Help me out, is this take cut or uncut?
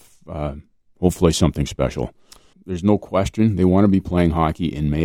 cut